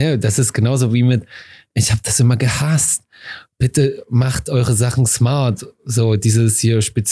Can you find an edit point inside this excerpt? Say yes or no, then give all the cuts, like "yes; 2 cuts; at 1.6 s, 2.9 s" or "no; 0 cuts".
no; 0 cuts